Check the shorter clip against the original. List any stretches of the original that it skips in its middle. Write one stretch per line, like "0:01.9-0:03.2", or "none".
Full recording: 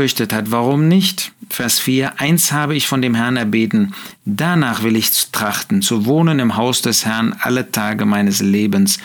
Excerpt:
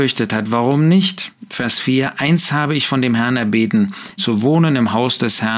0:04.2-0:05.8